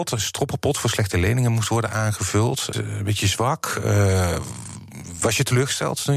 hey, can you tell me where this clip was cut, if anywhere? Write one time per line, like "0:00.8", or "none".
0:02.7